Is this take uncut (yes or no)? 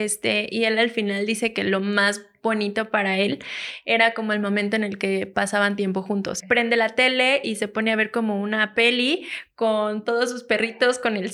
no